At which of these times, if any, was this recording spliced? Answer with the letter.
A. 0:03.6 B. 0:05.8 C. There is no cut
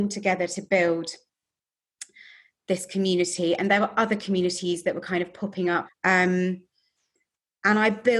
B